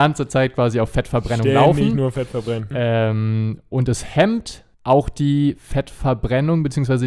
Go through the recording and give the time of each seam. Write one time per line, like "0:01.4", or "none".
0:02.7
0:04.7